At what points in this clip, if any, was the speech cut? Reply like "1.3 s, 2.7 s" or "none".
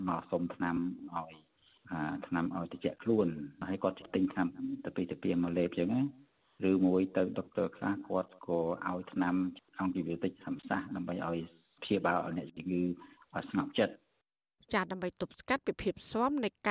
none